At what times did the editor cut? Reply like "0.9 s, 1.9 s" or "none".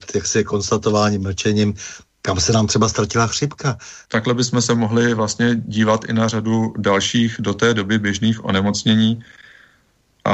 4.1 s